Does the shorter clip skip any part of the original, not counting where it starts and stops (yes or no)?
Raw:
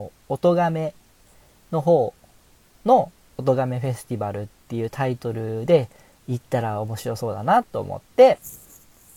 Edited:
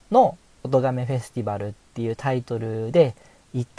no